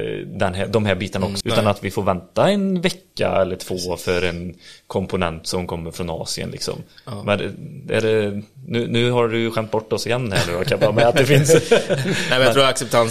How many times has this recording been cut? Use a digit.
1